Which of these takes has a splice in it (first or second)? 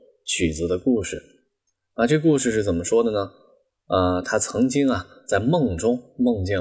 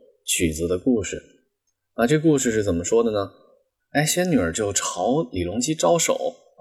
second